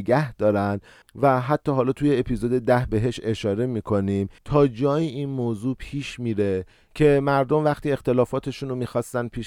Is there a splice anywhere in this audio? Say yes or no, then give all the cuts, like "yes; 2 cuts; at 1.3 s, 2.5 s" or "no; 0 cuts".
yes; 1 cut; at 4.4 s